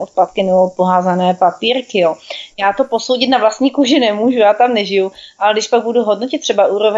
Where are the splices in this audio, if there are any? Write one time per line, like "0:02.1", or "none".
0:02.5